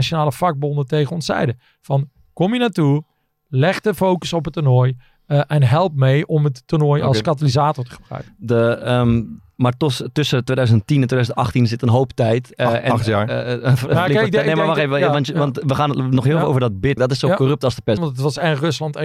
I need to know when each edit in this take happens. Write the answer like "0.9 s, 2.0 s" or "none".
17.0 s, 18.0 s